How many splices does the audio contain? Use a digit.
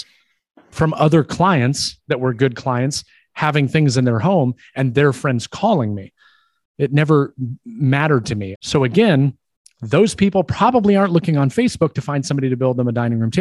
2